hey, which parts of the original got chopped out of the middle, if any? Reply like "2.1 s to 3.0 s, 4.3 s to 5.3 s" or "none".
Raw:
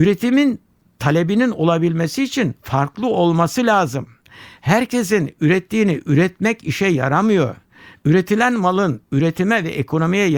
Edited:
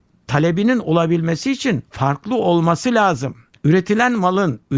4.3 s to 8.0 s